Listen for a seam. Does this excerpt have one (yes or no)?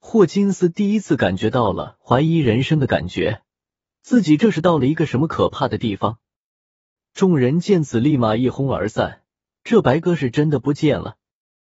yes